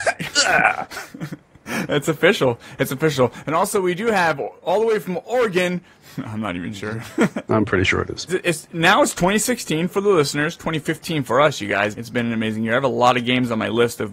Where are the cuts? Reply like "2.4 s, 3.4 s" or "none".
5.9 s, 8.3 s, 12.0 s